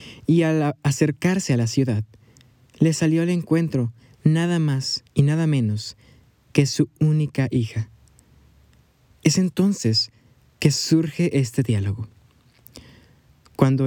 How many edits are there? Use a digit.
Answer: 0